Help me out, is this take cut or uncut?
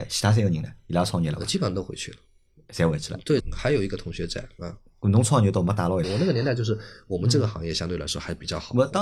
cut